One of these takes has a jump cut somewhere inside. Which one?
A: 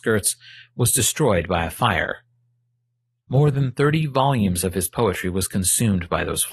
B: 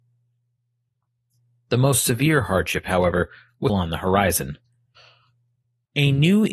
B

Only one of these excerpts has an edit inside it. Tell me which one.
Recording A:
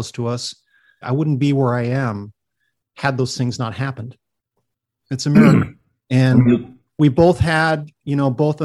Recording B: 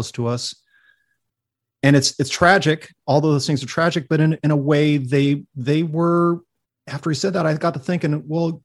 A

